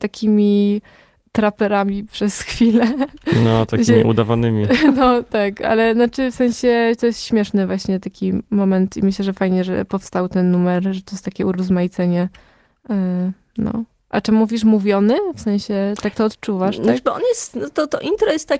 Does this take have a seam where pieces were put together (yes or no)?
no